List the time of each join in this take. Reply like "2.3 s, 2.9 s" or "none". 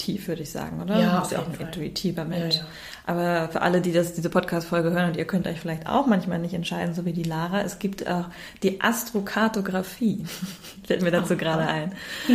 none